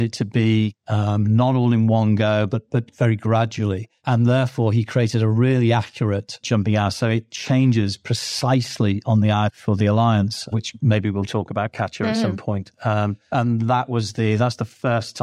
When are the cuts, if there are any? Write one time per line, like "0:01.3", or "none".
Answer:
0:06.4
0:09.5
0:10.5